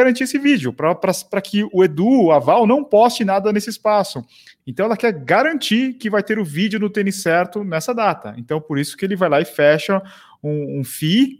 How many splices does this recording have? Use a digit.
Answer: 1